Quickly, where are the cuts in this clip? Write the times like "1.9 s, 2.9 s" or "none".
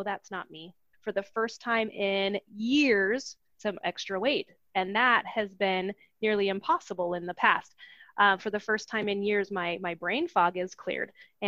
0.9 s, 3.5 s